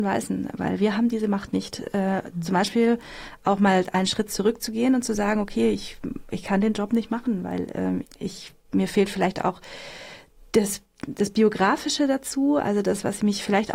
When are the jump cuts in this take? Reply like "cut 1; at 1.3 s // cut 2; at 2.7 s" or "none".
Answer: cut 1; at 8.0 s